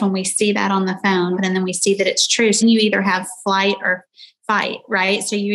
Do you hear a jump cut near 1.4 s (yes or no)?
yes